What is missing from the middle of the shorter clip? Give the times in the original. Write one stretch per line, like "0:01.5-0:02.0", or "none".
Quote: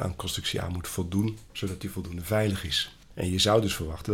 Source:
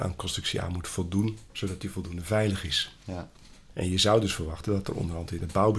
0:03.0-0:03.6